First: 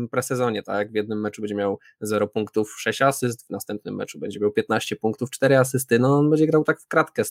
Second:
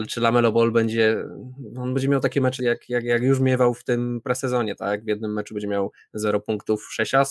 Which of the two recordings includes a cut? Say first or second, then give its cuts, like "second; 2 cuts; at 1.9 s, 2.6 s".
second; 1 cut; at 2.6 s